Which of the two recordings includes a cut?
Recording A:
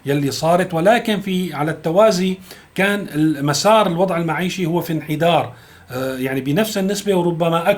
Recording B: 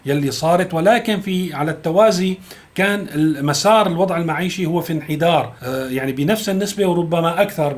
B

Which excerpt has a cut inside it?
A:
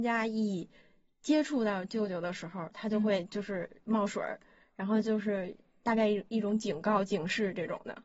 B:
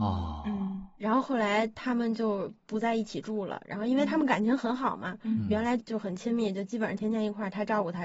B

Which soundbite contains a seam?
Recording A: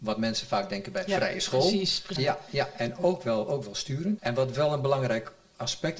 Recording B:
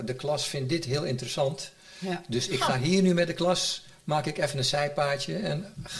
A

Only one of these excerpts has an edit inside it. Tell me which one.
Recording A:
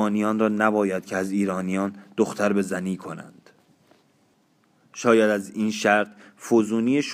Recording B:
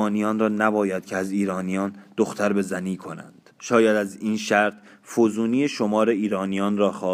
B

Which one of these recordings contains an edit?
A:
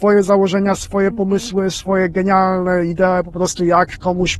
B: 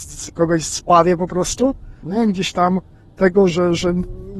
B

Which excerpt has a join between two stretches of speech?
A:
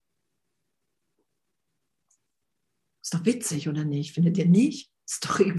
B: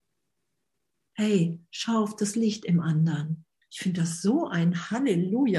B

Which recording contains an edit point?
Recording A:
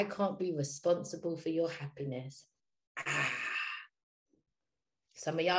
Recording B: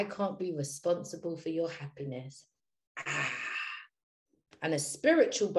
B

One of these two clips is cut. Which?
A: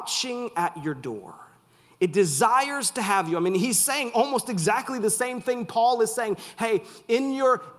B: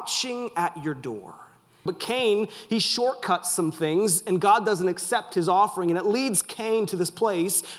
B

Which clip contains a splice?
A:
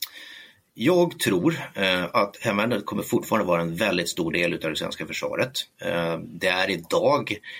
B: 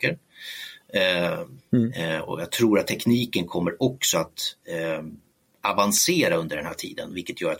B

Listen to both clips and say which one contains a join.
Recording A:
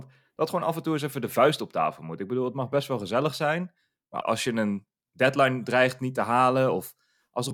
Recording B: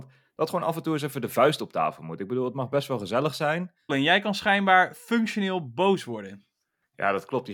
B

